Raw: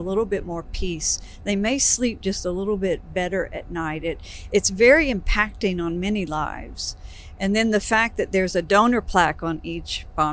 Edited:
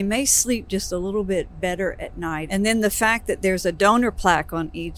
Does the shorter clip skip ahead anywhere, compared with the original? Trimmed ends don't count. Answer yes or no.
yes